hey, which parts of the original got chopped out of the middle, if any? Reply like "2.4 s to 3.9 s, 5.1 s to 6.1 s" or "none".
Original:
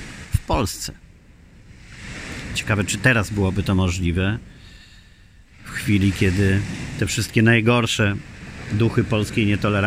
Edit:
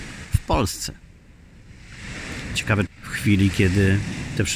2.9 s to 5.5 s